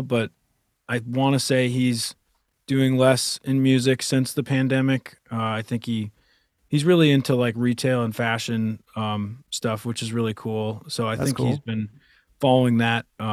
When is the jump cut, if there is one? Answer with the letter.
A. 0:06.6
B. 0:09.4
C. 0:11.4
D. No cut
D